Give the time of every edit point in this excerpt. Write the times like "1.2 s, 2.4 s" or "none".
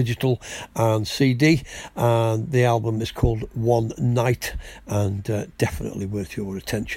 none